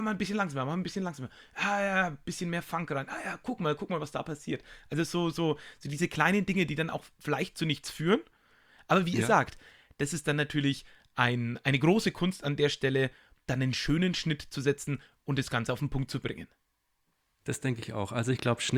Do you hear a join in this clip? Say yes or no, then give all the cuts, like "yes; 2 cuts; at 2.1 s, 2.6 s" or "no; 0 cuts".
yes; 1 cut; at 2.2 s